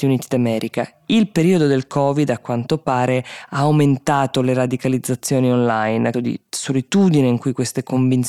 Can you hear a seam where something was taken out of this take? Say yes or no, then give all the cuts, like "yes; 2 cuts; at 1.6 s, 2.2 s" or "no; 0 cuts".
yes; 1 cut; at 6.1 s